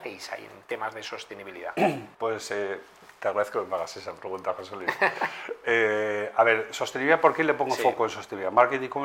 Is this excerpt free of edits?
no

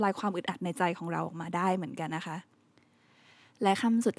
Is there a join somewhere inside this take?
yes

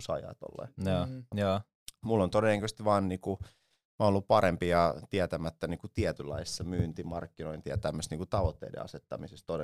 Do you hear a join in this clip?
yes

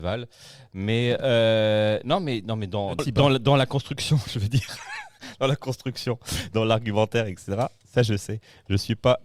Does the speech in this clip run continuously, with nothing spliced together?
no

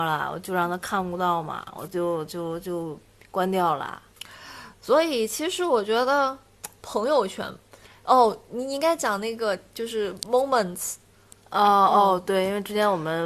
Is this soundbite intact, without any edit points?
yes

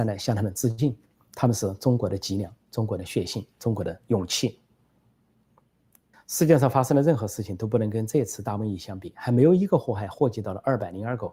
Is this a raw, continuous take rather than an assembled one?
no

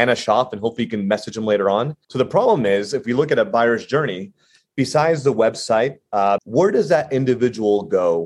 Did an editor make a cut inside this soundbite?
yes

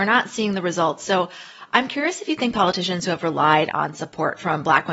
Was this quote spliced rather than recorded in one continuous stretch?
no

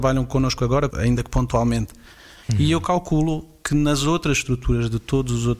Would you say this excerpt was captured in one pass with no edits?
no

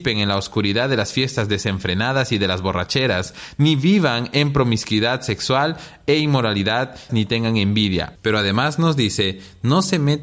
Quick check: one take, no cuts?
no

